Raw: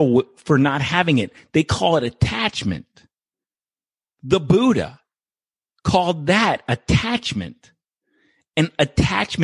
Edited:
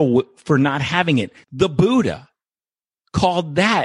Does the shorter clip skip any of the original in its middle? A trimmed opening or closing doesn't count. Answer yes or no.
yes